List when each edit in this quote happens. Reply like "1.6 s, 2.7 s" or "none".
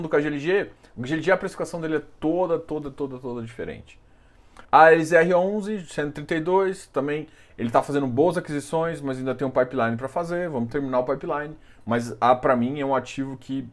4.6 s